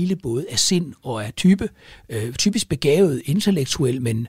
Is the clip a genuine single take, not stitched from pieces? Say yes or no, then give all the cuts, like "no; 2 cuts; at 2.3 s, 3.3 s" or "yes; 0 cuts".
yes; 0 cuts